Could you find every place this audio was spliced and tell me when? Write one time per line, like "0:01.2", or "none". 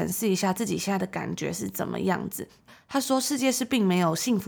none

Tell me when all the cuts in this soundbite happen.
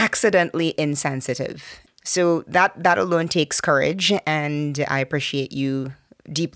0:01.9

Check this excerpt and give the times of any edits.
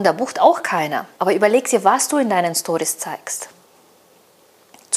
0:01.1

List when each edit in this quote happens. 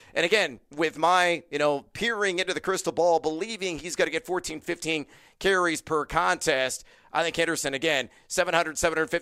none

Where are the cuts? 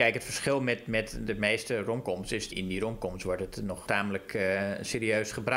0:02.5
0:03.9

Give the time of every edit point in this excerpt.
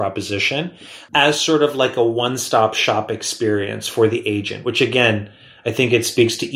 none

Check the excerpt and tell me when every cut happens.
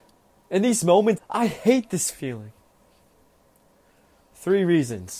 0:01.2

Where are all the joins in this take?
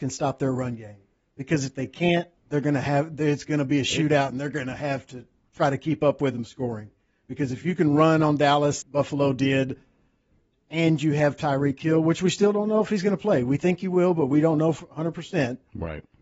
0:02.4
0:08.8

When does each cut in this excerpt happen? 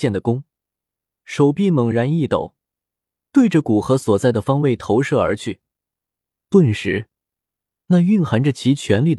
none

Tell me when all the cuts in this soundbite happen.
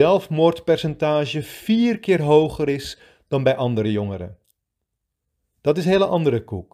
none

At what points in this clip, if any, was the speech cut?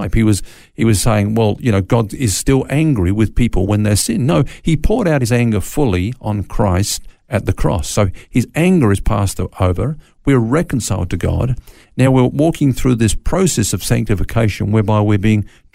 none

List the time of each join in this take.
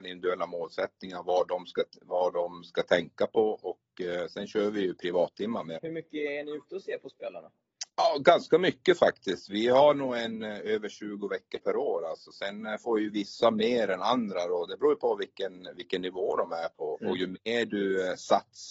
0:05.8
0:07.9
0:16.9

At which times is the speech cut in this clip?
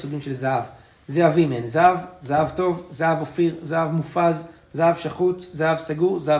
none

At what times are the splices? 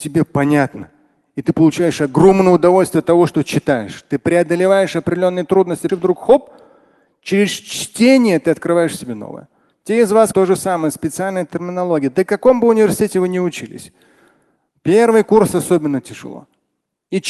0:05.9
0:10.3

